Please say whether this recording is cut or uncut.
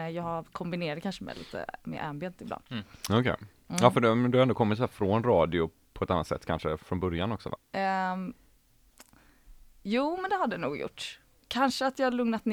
cut